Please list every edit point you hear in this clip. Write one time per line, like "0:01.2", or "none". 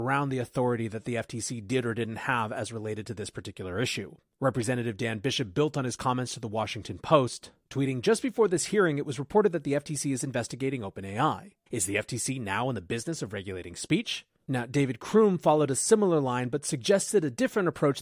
0:11.6
0:14.4

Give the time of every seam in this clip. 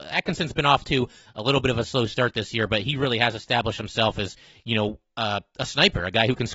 none

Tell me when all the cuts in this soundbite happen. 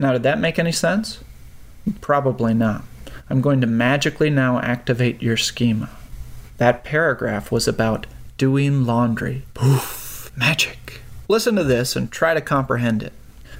0:11.3

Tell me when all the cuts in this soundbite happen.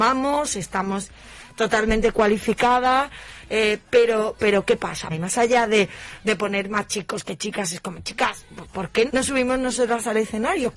0:05.1
0:09.1

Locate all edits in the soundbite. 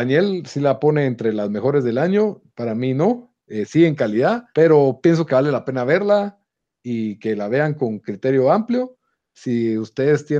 0:03.4
0:04.5

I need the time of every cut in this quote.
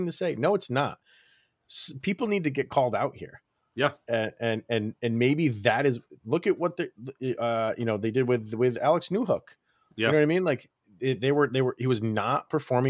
none

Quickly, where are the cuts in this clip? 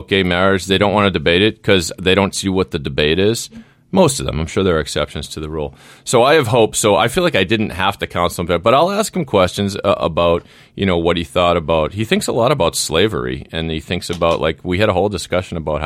none

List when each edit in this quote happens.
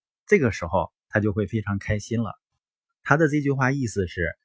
0:02.6

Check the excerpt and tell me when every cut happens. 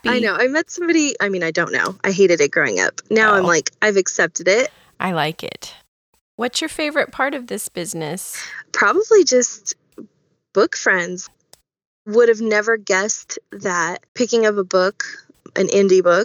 0:11.3
0:14.1

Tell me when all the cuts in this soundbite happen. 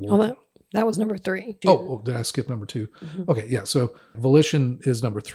0:01.6
0:04.1

